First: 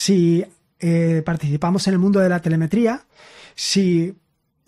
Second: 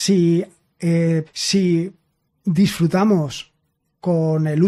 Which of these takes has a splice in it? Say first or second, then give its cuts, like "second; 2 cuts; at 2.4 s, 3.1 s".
second; 1 cut; at 1.3 s